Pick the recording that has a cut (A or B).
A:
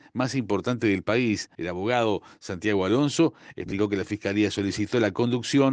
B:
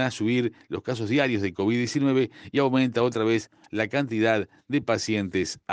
A